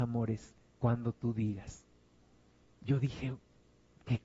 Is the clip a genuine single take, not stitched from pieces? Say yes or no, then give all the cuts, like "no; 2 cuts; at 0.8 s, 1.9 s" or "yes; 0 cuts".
no; 1 cut; at 2.7 s